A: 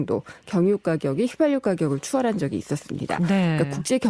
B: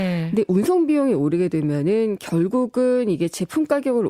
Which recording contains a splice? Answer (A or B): A